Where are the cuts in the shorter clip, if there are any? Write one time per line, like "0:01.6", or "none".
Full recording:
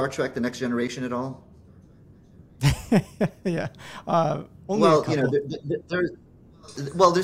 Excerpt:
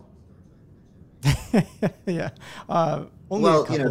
none